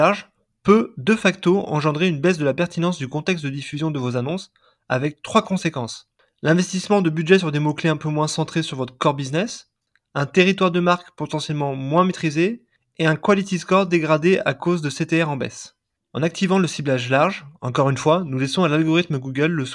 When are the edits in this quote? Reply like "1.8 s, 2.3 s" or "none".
16.0 s